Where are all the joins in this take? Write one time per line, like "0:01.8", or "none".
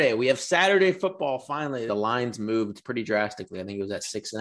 0:01.9